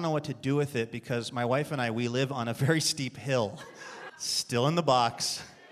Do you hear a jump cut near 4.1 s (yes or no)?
yes